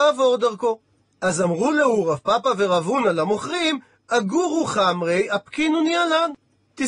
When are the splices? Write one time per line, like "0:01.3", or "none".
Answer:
none